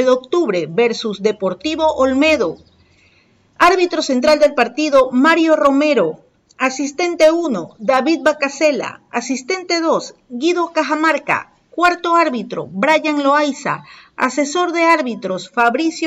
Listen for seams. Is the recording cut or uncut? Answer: uncut